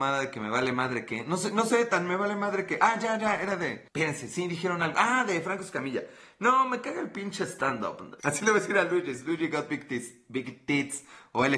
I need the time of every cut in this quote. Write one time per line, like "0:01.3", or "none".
0:03.9
0:08.2